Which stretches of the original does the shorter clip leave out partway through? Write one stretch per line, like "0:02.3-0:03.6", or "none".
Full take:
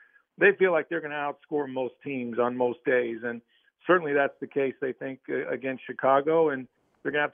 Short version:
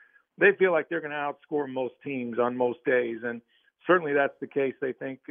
none